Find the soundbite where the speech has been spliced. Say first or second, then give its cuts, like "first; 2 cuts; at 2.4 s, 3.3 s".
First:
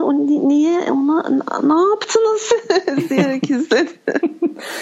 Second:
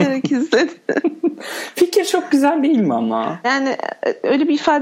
second; 1 cut; at 3.4 s